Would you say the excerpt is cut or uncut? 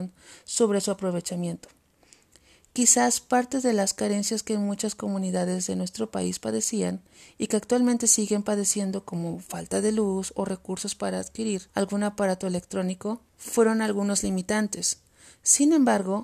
cut